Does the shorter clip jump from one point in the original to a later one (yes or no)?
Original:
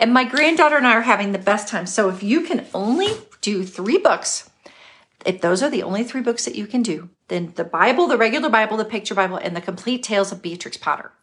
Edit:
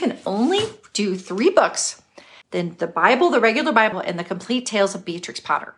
yes